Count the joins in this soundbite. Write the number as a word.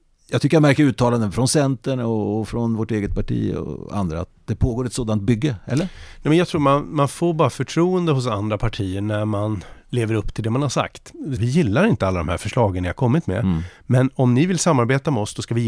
one